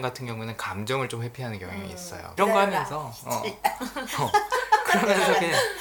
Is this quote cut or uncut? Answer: cut